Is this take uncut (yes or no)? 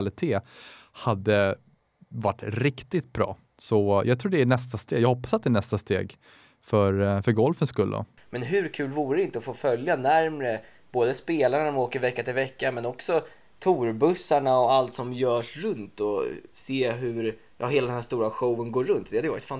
no